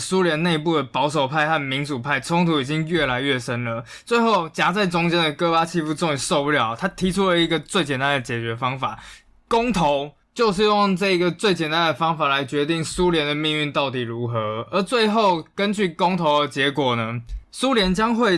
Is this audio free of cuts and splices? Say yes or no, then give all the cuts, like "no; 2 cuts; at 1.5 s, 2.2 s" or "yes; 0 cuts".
yes; 0 cuts